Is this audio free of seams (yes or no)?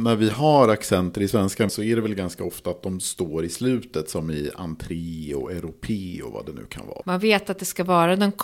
no